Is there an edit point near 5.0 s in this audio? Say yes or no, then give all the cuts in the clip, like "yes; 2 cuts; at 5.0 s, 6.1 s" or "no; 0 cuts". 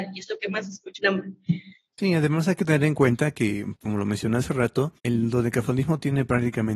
yes; 3 cuts; at 1.0 s, 3.8 s, 5.0 s